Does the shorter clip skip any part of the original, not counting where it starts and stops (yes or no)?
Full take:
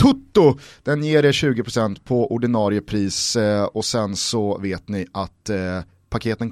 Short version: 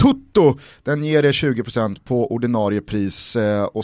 no